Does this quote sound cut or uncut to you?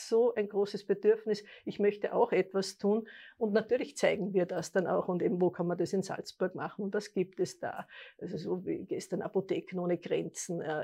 uncut